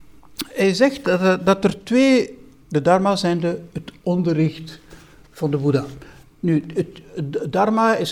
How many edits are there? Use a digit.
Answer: 1